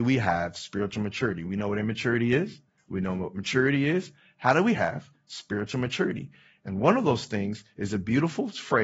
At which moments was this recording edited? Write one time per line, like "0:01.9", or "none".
none